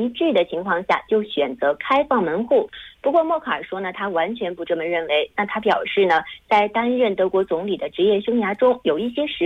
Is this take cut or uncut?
uncut